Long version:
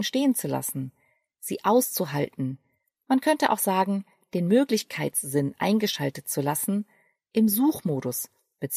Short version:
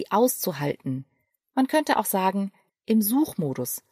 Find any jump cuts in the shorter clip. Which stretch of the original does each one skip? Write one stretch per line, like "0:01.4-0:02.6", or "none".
0:04.2-0:07.2